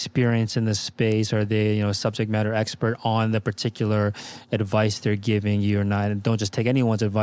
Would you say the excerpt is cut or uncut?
uncut